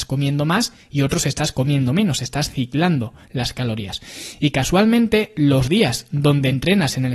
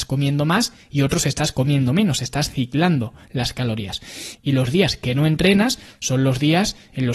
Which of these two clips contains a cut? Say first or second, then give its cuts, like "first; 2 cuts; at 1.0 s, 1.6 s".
second; 1 cut; at 4.4 s